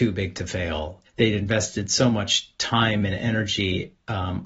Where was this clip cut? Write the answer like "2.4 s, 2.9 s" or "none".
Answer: 1.1 s